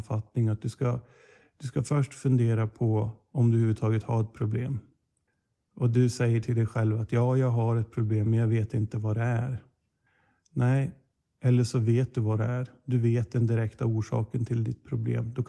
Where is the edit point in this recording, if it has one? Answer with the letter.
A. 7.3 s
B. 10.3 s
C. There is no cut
C